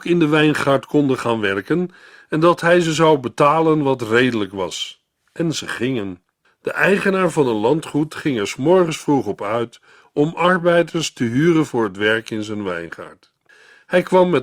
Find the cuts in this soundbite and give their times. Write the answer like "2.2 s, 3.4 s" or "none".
6.4 s